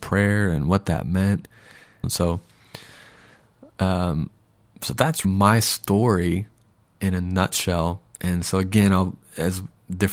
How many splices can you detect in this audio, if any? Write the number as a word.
two